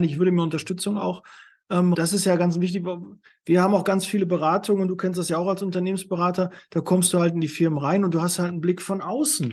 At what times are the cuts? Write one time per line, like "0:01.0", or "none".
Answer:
0:01.9